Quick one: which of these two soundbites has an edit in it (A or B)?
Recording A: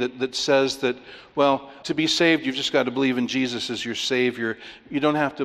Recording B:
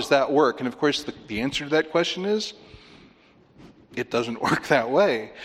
A